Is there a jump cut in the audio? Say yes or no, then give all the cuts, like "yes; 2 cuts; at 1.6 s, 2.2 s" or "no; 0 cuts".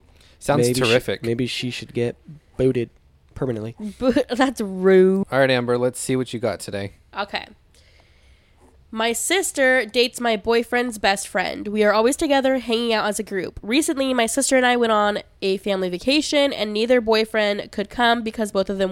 yes; 1 cut; at 5.2 s